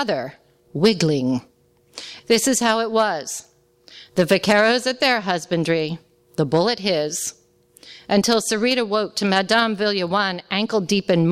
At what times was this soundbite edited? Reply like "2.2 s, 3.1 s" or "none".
2.2 s